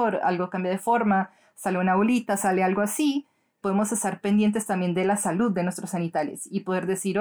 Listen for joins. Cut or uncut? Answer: cut